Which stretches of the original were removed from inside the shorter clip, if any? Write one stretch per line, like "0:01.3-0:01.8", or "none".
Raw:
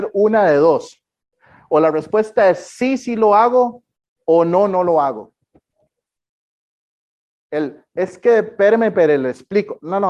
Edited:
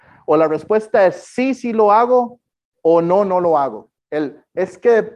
0:05.4-0:07.4